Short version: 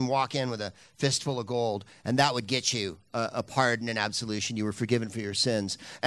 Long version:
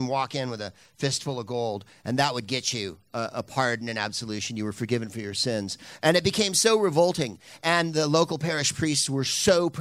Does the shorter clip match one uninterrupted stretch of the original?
yes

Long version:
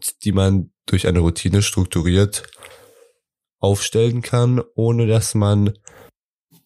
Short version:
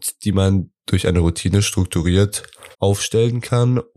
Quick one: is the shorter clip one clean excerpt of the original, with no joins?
no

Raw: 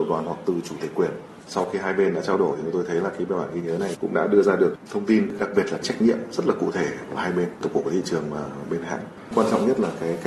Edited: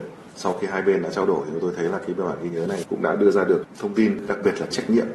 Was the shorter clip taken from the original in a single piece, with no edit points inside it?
yes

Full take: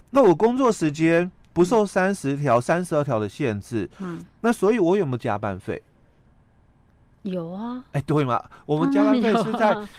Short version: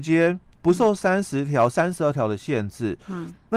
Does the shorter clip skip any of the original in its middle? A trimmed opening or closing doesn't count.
no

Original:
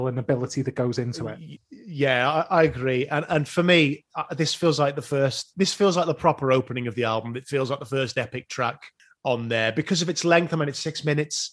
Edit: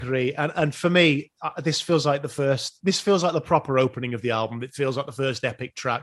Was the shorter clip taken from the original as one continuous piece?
yes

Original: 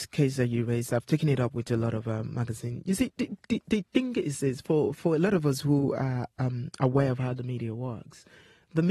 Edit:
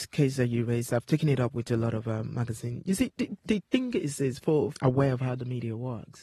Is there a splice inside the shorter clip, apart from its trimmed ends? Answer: yes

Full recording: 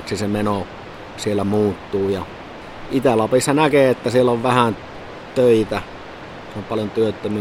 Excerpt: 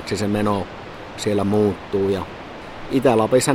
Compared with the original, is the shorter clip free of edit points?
yes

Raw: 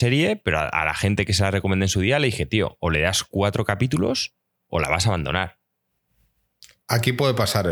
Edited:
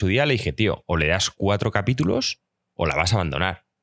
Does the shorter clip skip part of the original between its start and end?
no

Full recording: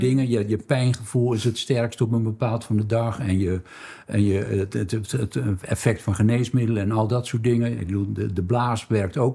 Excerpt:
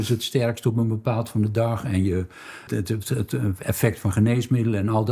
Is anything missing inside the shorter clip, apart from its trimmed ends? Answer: yes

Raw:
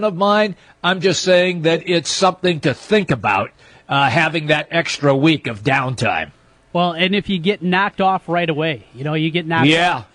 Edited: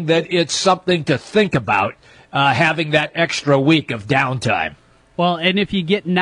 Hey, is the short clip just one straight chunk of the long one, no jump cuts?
yes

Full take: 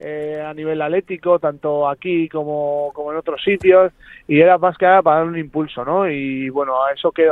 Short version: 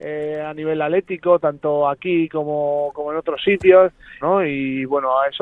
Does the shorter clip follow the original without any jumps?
no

